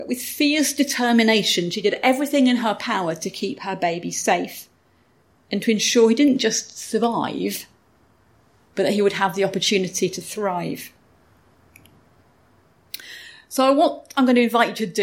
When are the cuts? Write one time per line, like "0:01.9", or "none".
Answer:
none

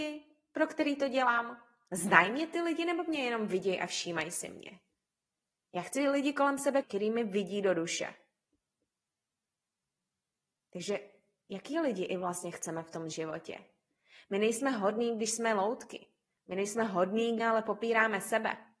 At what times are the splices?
0:06.8
0:17.4

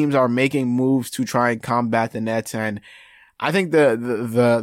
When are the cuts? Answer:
none

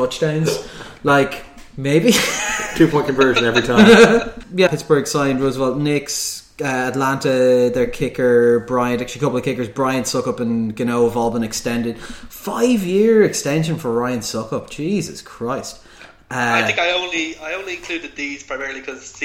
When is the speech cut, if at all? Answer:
0:04.7

